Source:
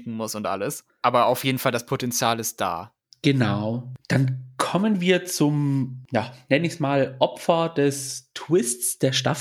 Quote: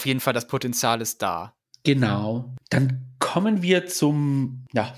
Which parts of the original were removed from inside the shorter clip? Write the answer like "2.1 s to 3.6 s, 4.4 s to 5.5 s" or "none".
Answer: none